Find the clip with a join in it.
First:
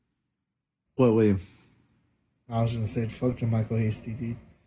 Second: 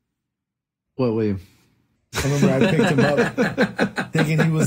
second; 1 cut; at 2.0 s

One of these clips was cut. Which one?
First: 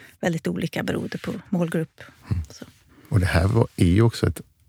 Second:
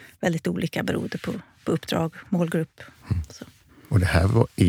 first; 1 cut; at 1.4 s

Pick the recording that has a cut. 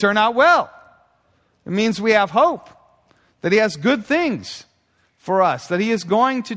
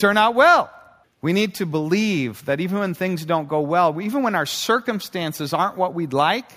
second; 1 cut; at 1.0 s

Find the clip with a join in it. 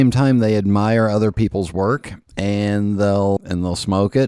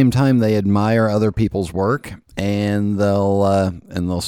first; 1 cut; at 3.4 s

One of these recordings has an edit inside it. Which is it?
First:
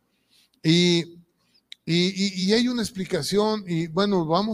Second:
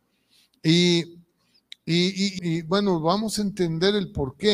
second; 1 cut; at 2.4 s

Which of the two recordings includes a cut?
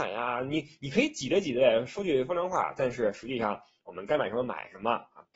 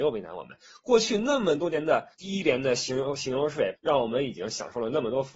second; 2 cuts; at 2.1 s, 3.7 s

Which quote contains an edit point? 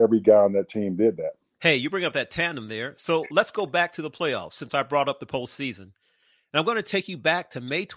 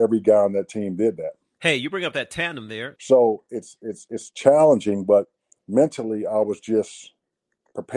second; 1 cut; at 3.0 s

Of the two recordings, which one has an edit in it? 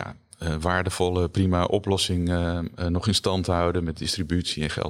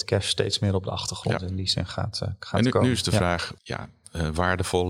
second; 1 cut; at 3.6 s

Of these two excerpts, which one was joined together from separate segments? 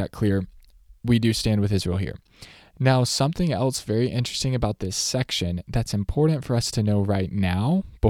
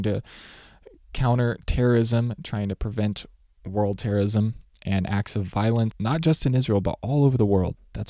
second; 1 cut; at 5.9 s

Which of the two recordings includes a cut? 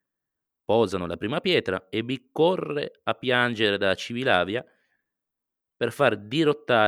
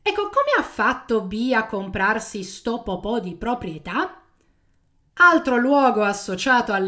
second; 1 cut; at 5.1 s

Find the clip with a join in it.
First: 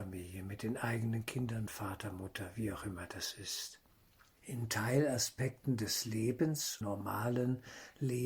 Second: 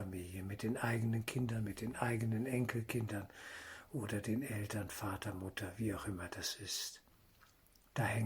first; 3 cuts; at 1.7 s, 4.4 s, 6.8 s

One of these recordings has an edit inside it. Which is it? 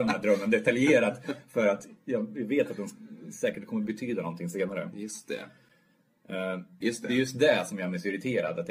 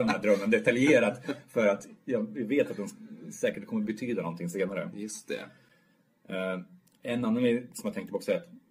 first; 1 cut; at 6.8 s

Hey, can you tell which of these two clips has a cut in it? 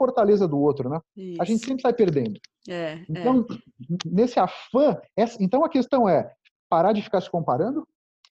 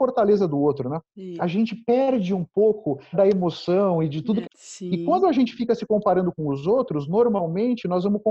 second; 3 cuts; at 1.4 s, 3.1 s, 4.4 s

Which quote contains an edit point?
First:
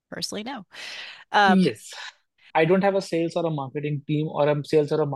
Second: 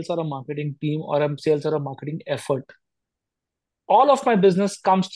first; 1 cut; at 2.5 s

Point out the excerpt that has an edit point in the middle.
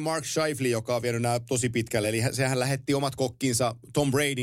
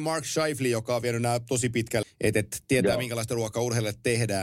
second; 1 cut; at 2.0 s

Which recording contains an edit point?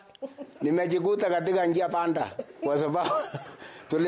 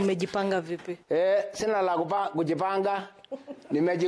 second; 1 cut; at 1.0 s

